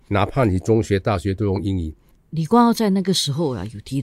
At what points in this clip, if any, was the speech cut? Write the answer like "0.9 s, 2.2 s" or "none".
2.2 s